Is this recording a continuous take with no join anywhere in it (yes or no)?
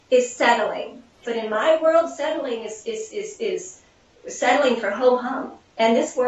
no